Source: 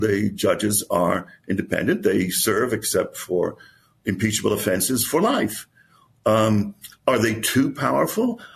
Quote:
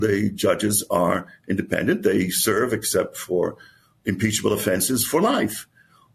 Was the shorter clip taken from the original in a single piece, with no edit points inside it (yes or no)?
yes